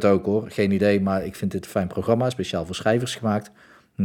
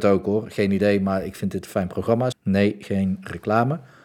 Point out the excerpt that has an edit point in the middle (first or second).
second